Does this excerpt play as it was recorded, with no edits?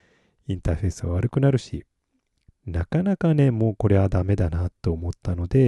no; 1 cut; at 2.5 s

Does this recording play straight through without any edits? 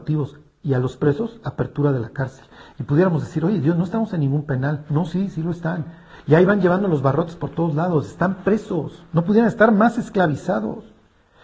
yes; 0 cuts

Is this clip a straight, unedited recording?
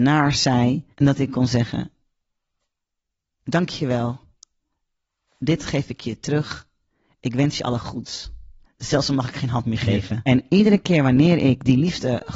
no; 3 cuts; at 0.9 s, 8.6 s, 10.3 s

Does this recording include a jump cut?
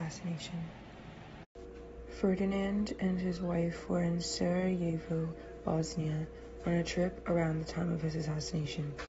no; 0 cuts

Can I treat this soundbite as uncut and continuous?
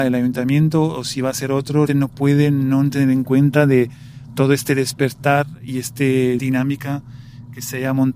no; 2 cuts; at 1.9 s, 6.4 s

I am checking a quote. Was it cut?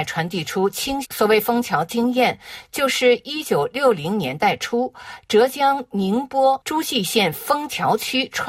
yes; 1 cut; at 1.0 s

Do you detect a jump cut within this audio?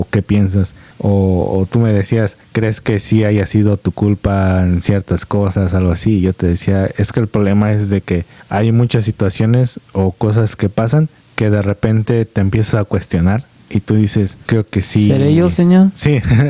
yes; 1 cut; at 14.5 s

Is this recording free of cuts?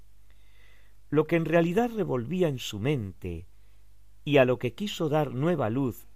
yes; 0 cuts

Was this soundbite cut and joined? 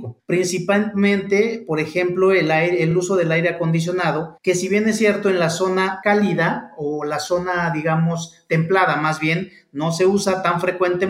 no; 0 cuts

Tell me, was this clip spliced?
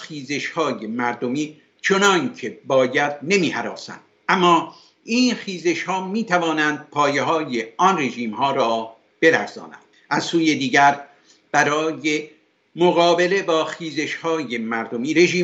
no; 0 cuts

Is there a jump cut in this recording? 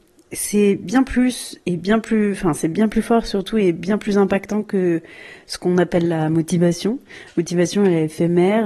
no; 0 cuts

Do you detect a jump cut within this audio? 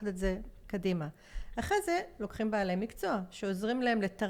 no; 0 cuts

